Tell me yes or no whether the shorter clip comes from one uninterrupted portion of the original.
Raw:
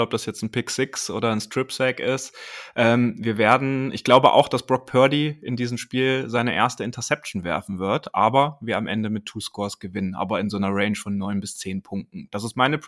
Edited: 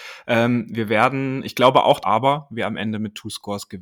no